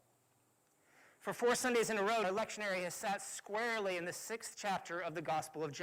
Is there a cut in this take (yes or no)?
yes